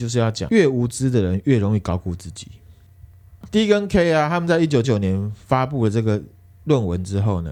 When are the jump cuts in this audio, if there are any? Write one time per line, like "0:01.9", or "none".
0:04.8